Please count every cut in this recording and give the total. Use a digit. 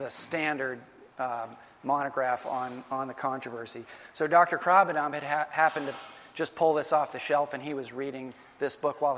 0